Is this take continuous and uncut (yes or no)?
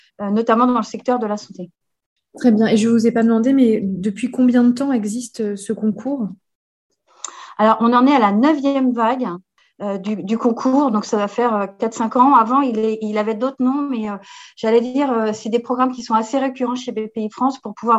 yes